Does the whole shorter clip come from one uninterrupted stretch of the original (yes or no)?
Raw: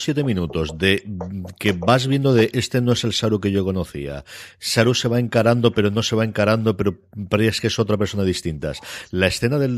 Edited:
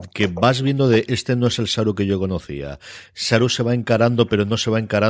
yes